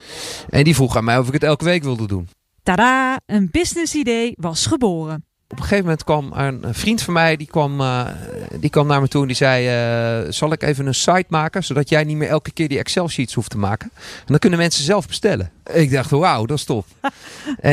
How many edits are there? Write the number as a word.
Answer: zero